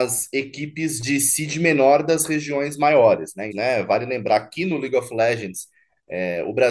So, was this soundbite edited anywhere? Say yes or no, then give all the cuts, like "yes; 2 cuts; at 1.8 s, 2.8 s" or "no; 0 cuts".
yes; 1 cut; at 3.5 s